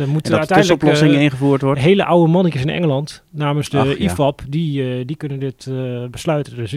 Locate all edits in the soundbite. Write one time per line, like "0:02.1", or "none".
none